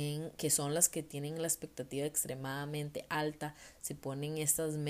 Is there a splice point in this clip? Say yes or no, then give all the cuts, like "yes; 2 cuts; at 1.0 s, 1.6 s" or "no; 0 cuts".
no; 0 cuts